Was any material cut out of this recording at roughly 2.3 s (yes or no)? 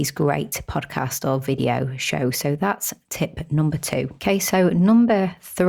no